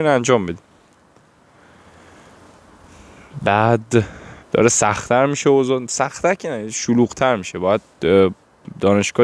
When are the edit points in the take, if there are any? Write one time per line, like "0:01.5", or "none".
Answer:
0:04.4